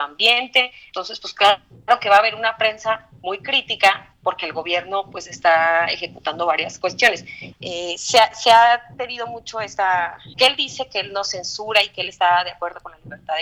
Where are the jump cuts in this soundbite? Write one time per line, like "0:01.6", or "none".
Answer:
0:07.5
0:10.3